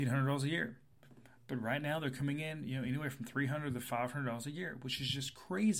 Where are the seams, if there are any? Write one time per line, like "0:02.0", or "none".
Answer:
none